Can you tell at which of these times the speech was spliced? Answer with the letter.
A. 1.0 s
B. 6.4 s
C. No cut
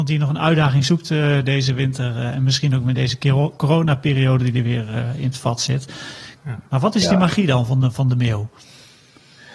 B